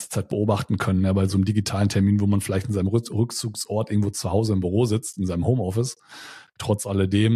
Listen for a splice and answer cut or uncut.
uncut